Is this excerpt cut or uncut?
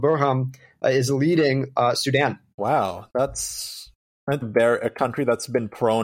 cut